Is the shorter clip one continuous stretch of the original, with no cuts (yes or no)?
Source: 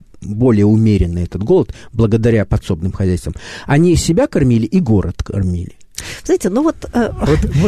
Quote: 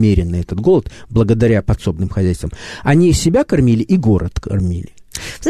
yes